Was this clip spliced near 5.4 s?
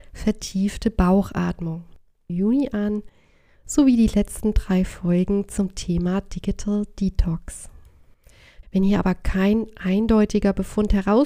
no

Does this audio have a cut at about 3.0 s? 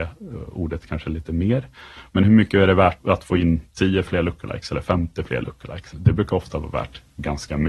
yes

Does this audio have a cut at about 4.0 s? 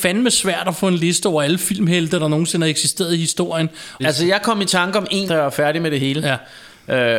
yes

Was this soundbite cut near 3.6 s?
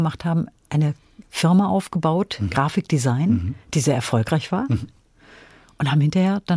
no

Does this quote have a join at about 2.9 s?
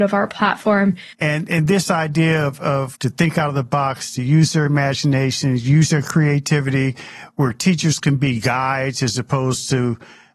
yes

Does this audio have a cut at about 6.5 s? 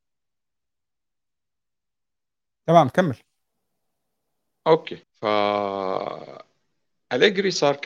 no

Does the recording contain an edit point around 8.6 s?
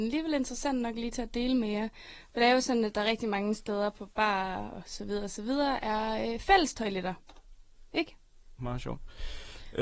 yes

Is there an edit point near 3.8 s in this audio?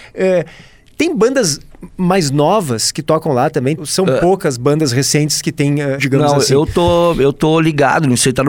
yes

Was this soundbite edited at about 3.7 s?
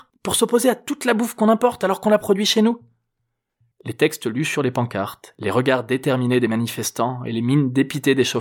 yes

